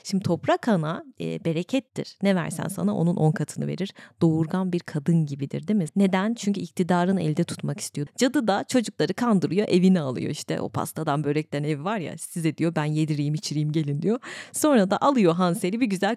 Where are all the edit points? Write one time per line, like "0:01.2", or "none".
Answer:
0:05.9
0:08.1